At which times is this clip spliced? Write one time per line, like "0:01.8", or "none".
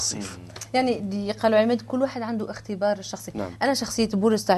none